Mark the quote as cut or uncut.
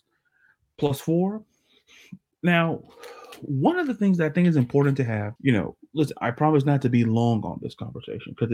cut